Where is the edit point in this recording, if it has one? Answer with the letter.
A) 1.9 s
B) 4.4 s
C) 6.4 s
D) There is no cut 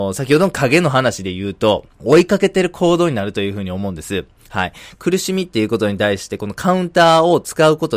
A